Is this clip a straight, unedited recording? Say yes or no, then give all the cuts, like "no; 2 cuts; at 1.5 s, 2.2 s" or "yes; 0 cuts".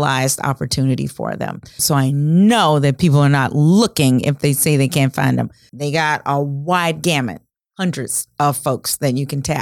no; 2 cuts; at 1.8 s, 5.7 s